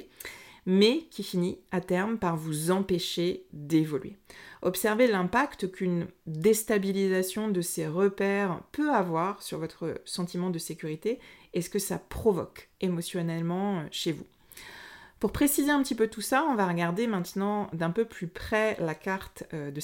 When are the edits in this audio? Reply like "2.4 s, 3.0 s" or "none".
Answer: none